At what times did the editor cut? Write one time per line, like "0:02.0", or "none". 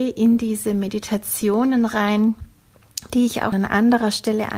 0:03.5